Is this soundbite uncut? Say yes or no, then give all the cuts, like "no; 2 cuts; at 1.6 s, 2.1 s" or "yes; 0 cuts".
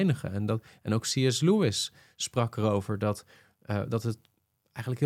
yes; 0 cuts